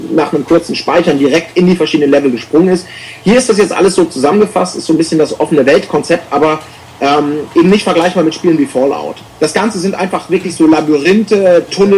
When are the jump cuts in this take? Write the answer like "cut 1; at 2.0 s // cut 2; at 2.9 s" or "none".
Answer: cut 1; at 9.3 s